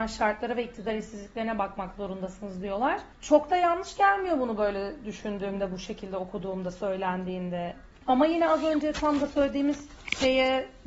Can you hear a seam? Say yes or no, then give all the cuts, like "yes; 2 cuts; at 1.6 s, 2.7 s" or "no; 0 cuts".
no; 0 cuts